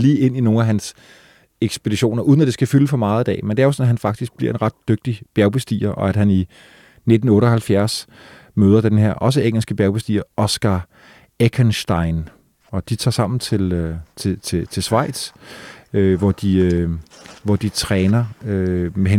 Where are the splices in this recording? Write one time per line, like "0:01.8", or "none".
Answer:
none